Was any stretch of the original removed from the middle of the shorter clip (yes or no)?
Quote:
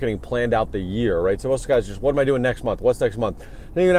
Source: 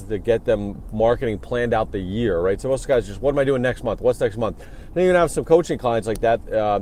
no